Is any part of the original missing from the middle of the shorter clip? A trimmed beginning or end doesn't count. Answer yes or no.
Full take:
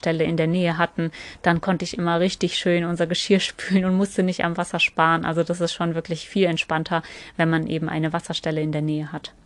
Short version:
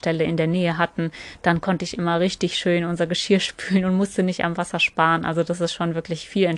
no